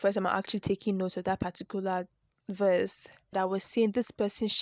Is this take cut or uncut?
cut